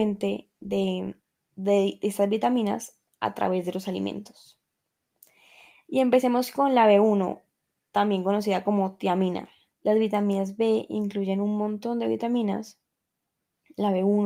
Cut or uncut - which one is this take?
cut